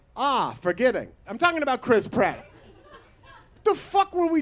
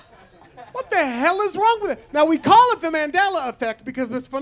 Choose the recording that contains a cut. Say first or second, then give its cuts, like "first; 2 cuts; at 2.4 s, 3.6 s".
first; 2 cuts; at 1.2 s, 2.4 s